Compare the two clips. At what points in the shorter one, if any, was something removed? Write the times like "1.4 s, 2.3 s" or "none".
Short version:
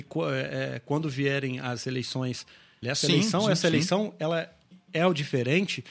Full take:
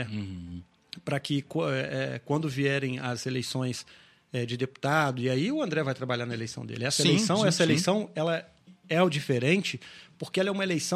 2.8 s